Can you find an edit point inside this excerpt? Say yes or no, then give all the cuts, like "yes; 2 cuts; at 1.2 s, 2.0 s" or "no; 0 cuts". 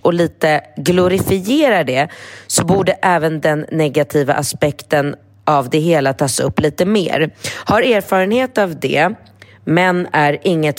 no; 0 cuts